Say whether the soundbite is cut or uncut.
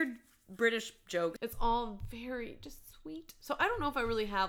cut